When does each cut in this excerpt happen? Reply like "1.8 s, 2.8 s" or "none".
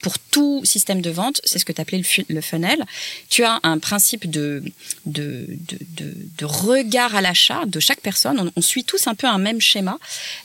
none